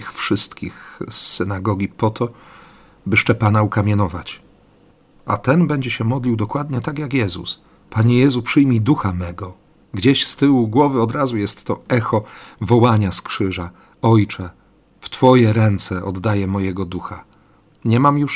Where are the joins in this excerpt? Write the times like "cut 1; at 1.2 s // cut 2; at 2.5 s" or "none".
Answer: none